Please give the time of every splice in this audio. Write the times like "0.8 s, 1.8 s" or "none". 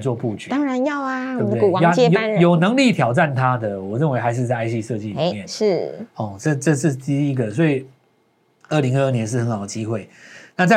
none

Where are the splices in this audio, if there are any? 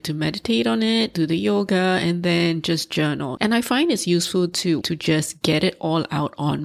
3.4 s, 4.8 s

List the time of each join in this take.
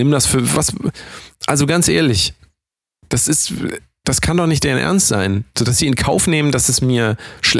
none

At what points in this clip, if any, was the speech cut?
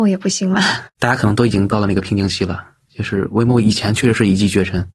1.0 s

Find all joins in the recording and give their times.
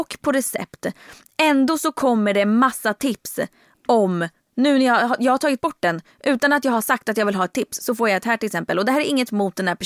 none

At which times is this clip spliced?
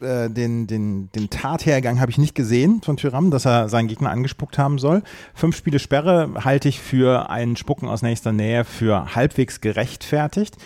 none

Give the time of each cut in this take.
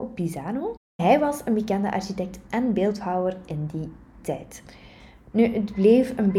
5.3 s

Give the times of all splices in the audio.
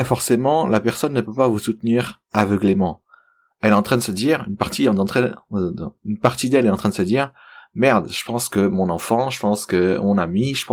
none

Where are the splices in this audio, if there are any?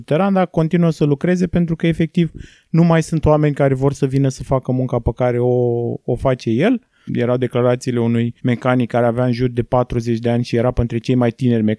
7.1 s, 8.4 s

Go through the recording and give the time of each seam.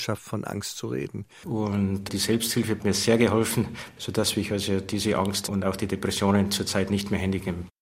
1.4 s

